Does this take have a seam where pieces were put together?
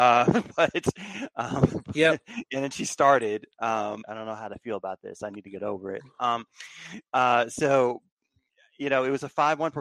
yes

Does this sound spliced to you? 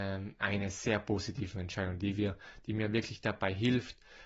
no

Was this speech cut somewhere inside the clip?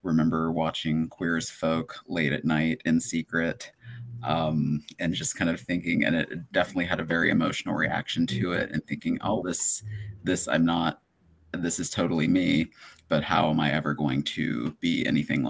yes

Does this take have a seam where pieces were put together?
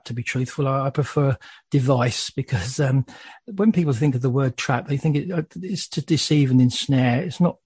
no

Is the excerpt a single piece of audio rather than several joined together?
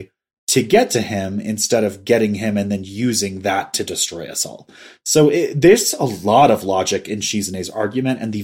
yes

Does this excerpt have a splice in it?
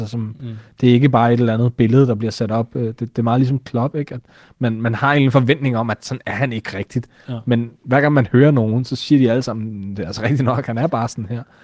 no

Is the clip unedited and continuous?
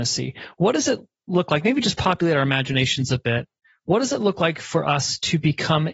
yes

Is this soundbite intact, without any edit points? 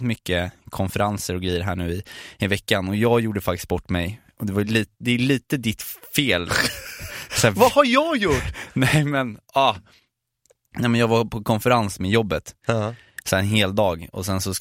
yes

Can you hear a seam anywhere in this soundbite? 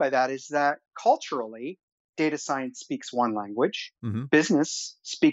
no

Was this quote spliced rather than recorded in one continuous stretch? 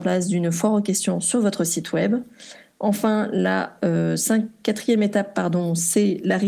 no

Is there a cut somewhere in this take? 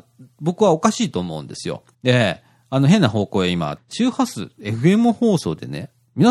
yes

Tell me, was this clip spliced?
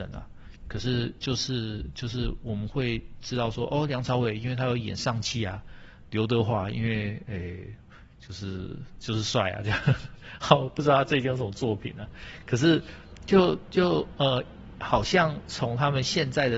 no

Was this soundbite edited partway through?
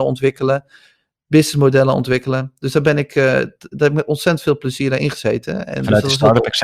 no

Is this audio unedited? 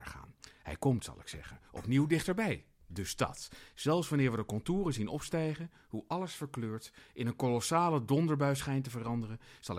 yes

